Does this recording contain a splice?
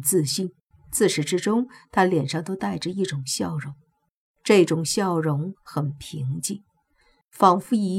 no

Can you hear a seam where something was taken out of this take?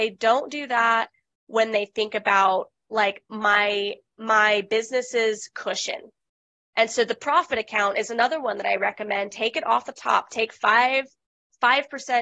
no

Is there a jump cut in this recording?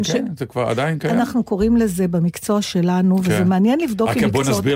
no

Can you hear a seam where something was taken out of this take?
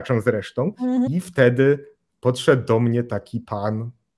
yes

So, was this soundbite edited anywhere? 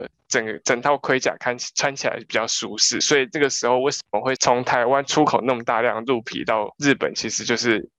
no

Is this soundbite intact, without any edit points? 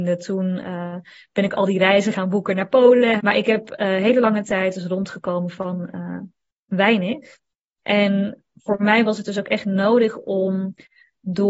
no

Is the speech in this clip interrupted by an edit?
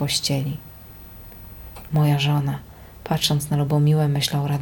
yes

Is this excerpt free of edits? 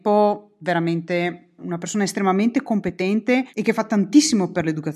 no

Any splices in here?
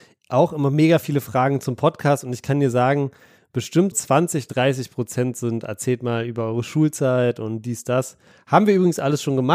yes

